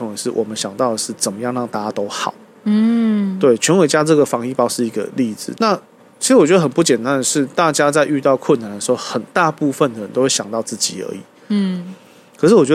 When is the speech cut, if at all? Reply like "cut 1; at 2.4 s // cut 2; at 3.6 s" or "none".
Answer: cut 1; at 5.5 s

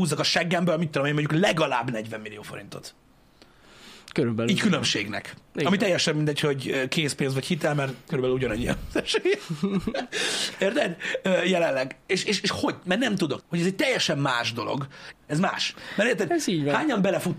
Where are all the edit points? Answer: cut 1; at 13.4 s // cut 2; at 15.1 s

